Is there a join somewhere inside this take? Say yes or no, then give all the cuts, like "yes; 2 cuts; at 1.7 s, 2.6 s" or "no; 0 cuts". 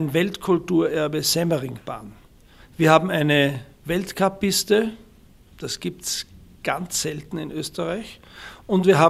yes; 1 cut; at 2.6 s